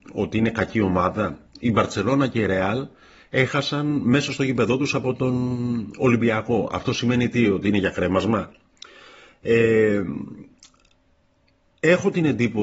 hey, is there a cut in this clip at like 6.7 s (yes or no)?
no